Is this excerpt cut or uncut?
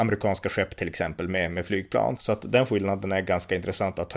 cut